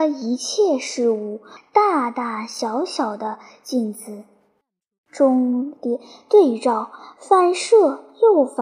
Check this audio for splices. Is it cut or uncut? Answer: cut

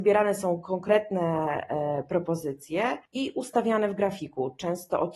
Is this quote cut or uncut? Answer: cut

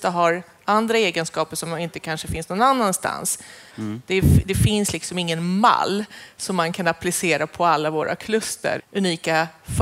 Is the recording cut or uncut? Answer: cut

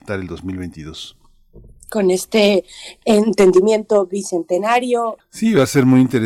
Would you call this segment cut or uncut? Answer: cut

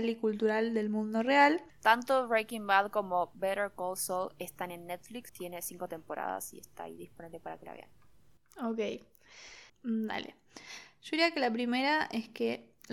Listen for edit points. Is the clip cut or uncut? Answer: cut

